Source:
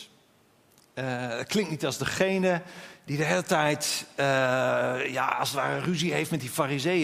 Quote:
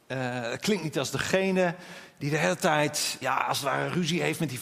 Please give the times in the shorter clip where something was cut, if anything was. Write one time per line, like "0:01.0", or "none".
0:03.2